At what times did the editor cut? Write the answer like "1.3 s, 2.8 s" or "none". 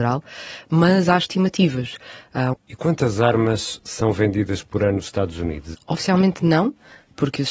2.5 s, 5.7 s

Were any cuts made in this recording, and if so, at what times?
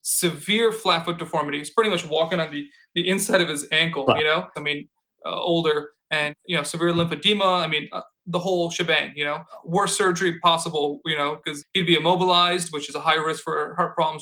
4.5 s, 11.6 s

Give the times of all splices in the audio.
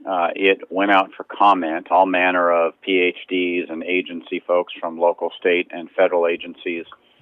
none

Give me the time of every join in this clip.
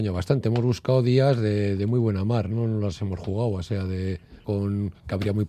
4.4 s

